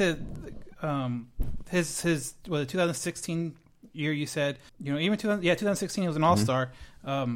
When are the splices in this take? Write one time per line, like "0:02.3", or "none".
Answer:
0:04.7